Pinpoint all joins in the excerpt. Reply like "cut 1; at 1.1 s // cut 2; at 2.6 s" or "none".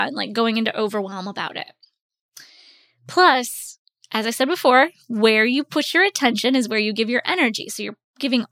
none